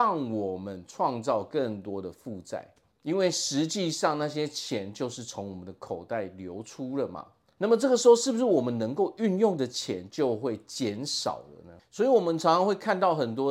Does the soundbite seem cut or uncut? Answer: uncut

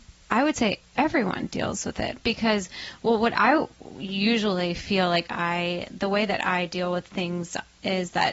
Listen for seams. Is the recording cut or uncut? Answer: cut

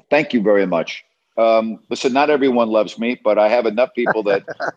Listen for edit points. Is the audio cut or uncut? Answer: cut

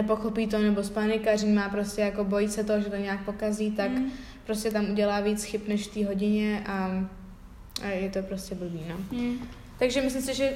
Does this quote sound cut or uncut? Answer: uncut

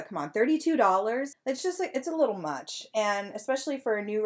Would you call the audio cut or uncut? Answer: cut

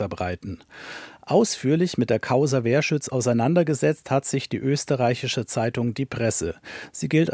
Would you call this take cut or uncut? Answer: uncut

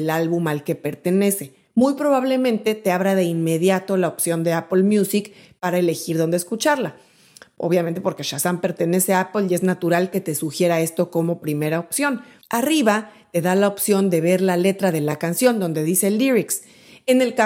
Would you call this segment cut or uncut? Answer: cut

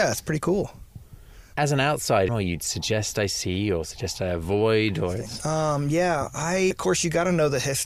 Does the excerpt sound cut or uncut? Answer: cut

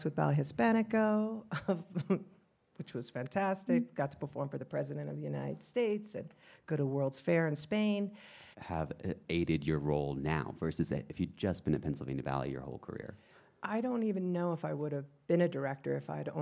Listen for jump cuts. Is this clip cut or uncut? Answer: cut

